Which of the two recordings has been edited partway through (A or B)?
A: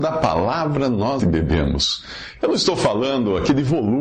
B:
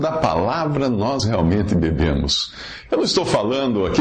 A